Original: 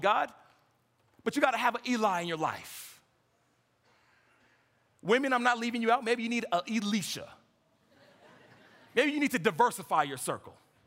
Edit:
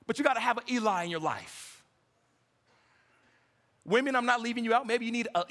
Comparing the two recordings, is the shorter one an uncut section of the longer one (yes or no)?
yes